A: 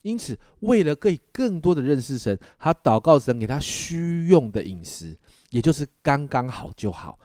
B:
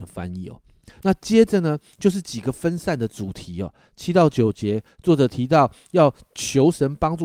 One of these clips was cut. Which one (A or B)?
B